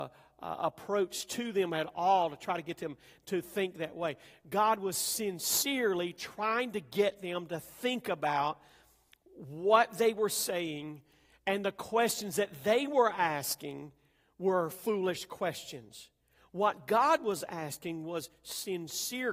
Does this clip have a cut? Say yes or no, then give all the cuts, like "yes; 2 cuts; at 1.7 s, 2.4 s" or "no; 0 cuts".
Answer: no; 0 cuts